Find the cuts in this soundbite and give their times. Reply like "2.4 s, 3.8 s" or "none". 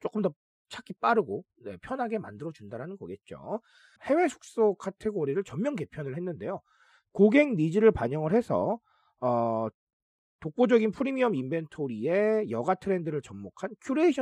4.0 s